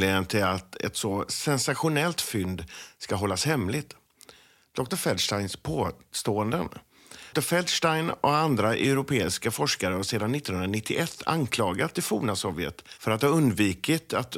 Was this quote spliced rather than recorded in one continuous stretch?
yes; 2 cuts; at 4.9 s, 7.3 s

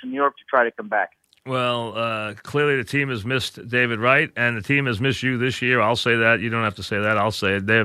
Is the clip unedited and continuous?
yes; 0 cuts

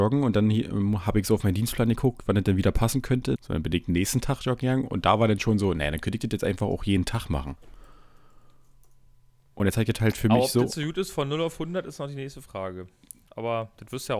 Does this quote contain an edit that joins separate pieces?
yes; 1 cut; at 3.4 s

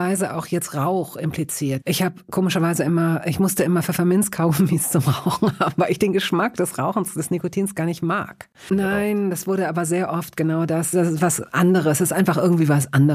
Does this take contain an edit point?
yes; 3 cuts; at 1.8 s, 8.7 s, 10.9 s

